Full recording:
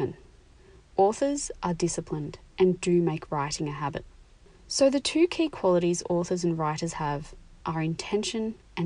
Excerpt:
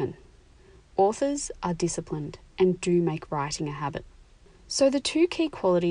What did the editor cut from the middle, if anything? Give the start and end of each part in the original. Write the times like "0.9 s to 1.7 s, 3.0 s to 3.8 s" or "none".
none